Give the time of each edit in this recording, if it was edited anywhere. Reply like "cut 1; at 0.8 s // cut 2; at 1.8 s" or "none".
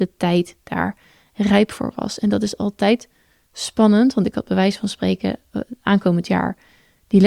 none

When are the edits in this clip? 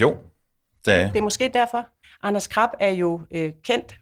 cut 1; at 2.0 s

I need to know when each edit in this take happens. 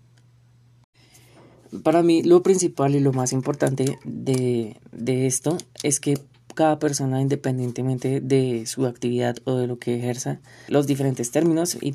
cut 1; at 10.7 s

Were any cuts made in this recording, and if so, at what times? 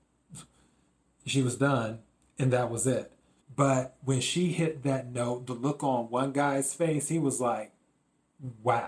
cut 1; at 3.4 s

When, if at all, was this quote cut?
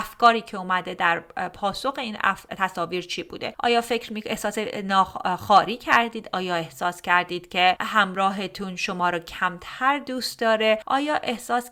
none

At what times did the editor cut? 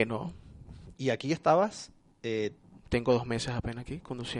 cut 1; at 0.9 s

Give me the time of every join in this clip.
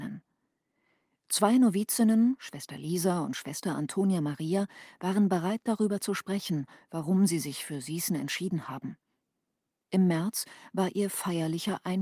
none

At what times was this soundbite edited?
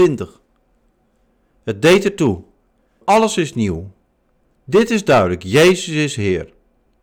cut 1; at 3.0 s

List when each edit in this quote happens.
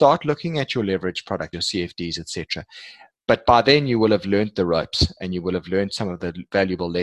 cut 1; at 1.5 s

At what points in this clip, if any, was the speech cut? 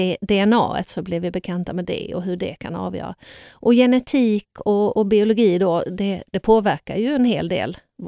none

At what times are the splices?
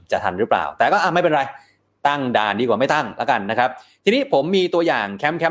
none

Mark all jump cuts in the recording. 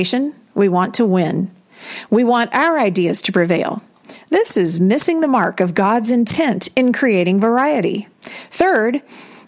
cut 1; at 8.1 s

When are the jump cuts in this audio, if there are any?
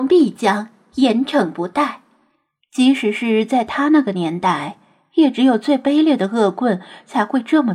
cut 1; at 2.6 s

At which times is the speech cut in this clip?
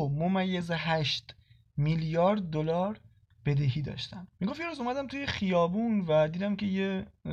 cut 1; at 4.3 s

